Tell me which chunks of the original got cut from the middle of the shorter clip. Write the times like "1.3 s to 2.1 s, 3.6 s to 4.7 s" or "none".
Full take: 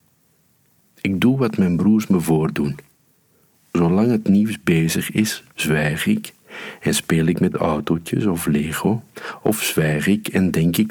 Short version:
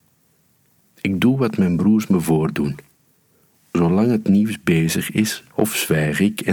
5.5 s to 9.4 s